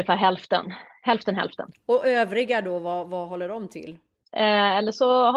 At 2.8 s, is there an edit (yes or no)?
no